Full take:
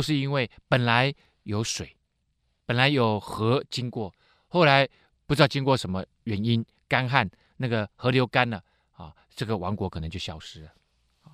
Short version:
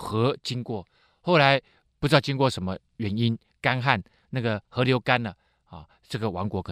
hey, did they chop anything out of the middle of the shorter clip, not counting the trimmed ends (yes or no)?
no